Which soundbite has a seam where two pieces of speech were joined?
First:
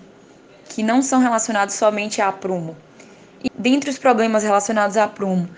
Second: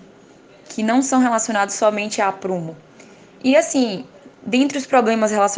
first; 1 cut; at 3.5 s

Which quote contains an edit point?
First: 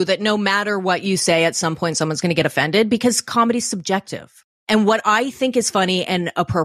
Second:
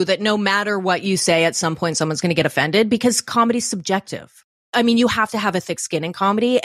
second; 1 cut; at 4.6 s

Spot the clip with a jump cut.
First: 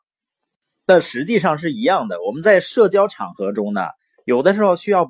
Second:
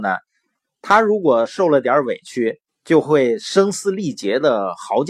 second; 1 cut; at 2.7 s

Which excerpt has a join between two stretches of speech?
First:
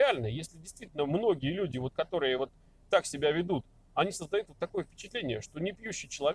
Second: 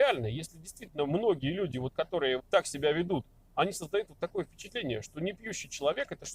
second; 1 cut; at 2.4 s

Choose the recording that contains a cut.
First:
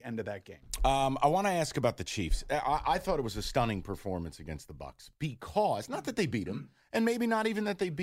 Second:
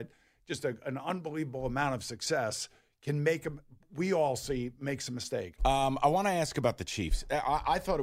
second; 1 cut; at 5.6 s

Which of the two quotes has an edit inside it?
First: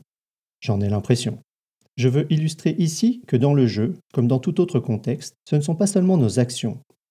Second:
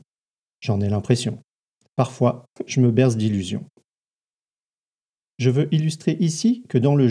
first; 2 cuts; at 1.9 s, 5.4 s

